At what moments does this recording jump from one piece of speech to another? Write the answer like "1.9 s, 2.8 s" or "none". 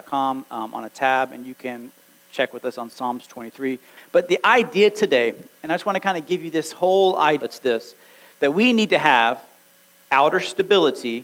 4.0 s, 7.4 s